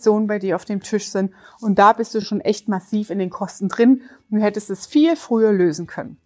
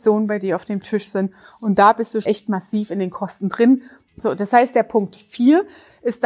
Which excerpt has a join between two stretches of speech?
second; 2 cuts; at 2.2 s, 4.1 s

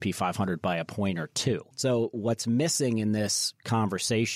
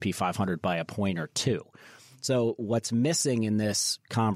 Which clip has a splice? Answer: first; 1 cut; at 1.7 s

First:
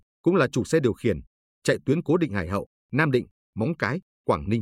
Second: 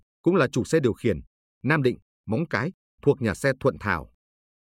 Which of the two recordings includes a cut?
second; 2 cuts; at 1.5 s, 2.9 s

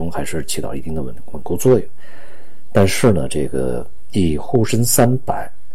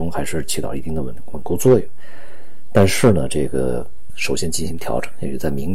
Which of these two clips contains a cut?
second; 1 cut; at 4.1 s

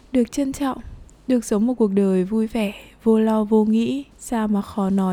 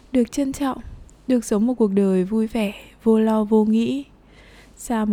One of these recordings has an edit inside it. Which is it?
first; 1 cut; at 4.1 s

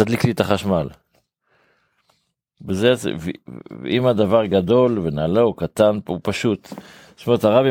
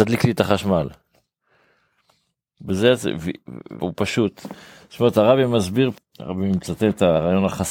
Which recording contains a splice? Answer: second; 2 cuts; at 3.8 s, 6.0 s

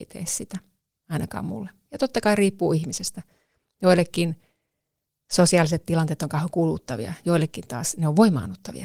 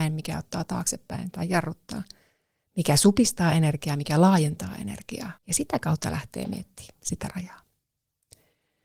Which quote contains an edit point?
second; 1 cut; at 5.4 s

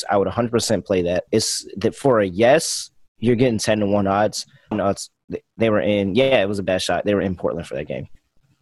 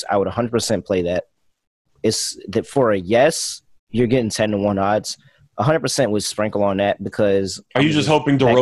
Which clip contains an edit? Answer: first; 2 cuts; at 1.3 s, 4.7 s

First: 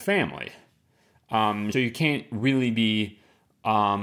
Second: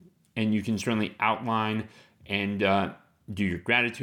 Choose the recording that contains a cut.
first; 1 cut; at 1.7 s

